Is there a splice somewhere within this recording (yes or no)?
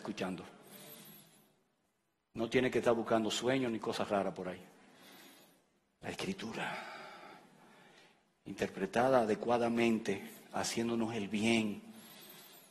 no